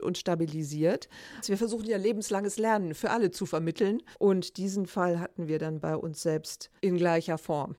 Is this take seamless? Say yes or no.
no